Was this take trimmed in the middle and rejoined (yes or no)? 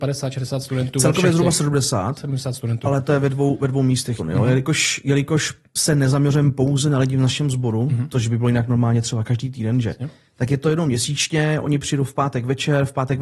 yes